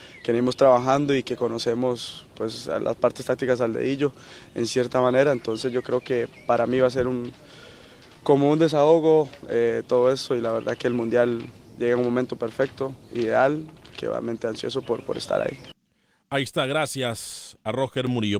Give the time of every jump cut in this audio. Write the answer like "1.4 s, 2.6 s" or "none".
none